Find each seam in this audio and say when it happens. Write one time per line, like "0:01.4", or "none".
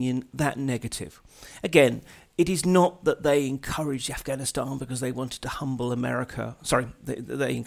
none